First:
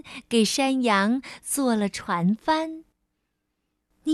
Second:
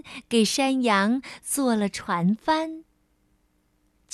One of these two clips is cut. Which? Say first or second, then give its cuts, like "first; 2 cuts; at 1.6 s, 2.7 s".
second; 1 cut; at 2.9 s